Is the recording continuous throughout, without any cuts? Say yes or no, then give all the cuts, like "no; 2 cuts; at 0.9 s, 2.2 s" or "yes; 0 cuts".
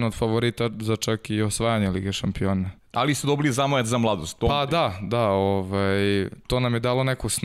no; 1 cut; at 2.8 s